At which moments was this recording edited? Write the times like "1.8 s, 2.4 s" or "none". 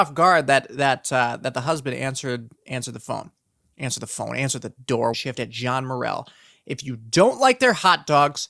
5.1 s